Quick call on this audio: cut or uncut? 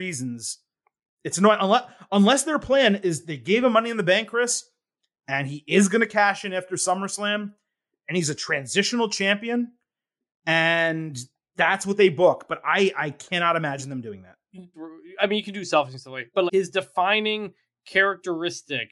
cut